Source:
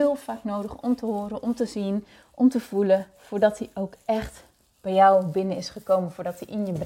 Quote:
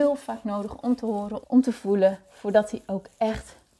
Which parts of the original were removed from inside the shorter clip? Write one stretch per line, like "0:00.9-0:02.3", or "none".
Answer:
0:01.4-0:02.3